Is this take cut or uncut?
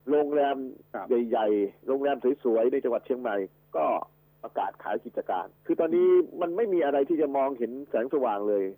cut